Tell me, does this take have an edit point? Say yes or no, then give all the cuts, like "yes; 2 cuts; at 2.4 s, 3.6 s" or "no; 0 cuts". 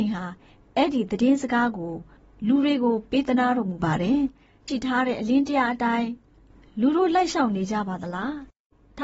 yes; 1 cut; at 4.7 s